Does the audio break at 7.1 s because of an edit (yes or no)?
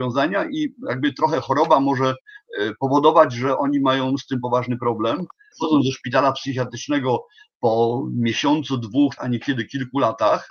no